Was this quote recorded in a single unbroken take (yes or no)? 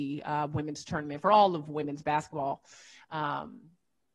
yes